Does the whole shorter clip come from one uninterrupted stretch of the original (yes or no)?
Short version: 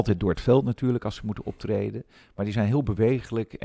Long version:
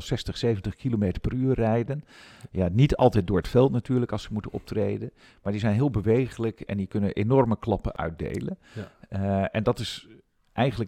yes